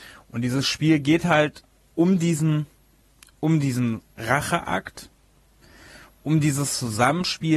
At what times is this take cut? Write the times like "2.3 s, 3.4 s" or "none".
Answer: none